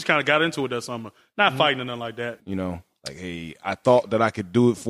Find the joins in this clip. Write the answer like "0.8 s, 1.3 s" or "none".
2.4 s